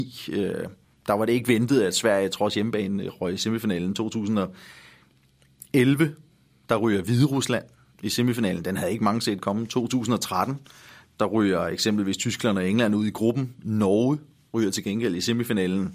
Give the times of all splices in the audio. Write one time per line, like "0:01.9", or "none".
none

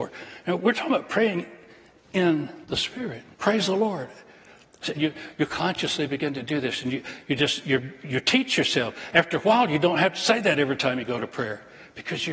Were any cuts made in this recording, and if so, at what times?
0:03.3
0:04.9

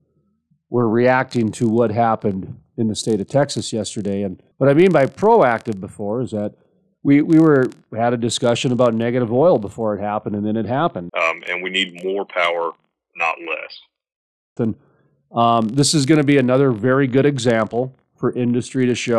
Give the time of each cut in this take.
0:04.5
0:11.1
0:14.6

